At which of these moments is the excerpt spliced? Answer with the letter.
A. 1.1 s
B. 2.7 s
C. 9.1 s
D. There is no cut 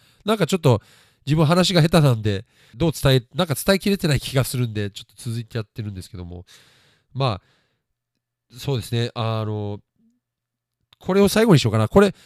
B